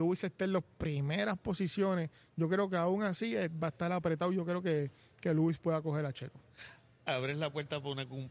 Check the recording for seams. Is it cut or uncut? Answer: uncut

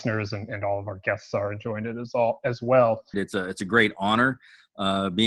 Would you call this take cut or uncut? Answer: cut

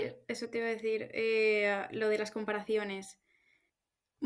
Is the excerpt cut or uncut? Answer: uncut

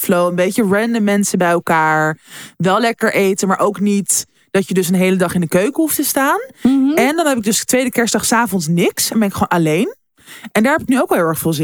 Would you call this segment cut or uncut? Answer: uncut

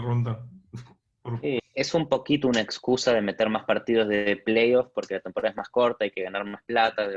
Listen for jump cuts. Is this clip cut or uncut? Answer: cut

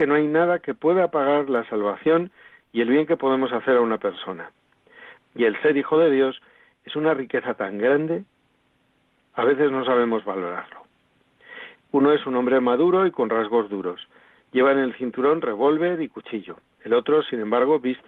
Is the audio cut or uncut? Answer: cut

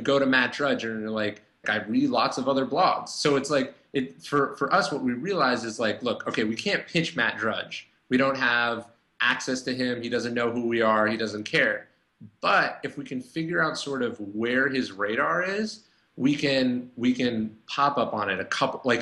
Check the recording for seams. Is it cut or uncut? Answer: cut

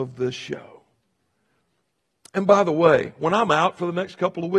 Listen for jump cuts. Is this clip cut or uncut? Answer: uncut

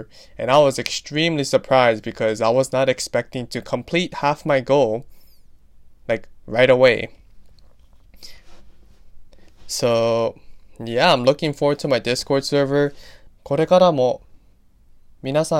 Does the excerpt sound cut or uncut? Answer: cut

